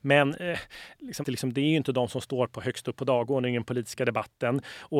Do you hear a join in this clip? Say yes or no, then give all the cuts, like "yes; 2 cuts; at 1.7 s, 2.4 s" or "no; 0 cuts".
yes; 1 cut; at 1.2 s